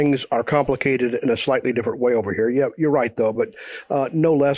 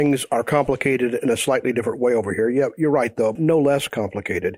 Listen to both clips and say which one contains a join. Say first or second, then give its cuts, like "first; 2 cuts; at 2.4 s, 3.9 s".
second; 1 cut; at 3.4 s